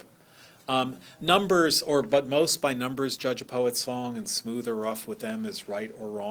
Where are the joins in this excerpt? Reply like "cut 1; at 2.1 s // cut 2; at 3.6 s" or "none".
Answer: none